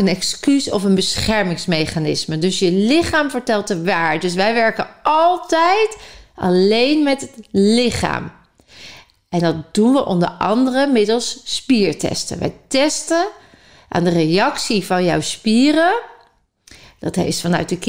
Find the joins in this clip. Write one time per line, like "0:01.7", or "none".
none